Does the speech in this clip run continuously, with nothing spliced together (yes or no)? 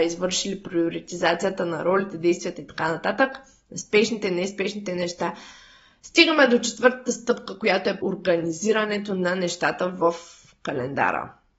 no